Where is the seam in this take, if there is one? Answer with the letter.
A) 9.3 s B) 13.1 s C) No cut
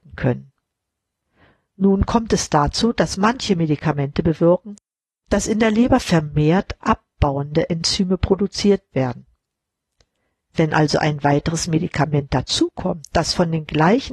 C